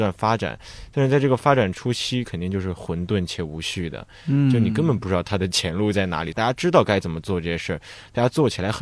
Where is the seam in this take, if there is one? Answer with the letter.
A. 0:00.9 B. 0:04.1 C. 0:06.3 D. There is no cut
C